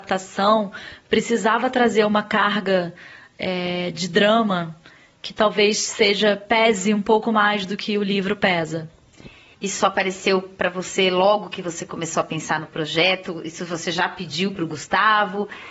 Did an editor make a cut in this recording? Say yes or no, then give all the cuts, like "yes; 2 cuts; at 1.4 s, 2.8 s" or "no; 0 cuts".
yes; 1 cut; at 9.5 s